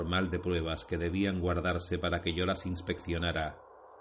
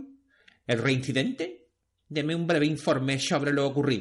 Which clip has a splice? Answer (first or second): second